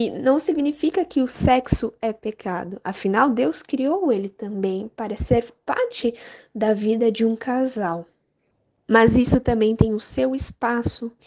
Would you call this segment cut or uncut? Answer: uncut